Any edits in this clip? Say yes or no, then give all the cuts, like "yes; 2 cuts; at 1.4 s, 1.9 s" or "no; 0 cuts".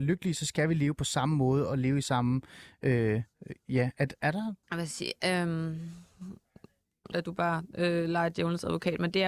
yes; 2 cuts; at 4.6 s, 7.1 s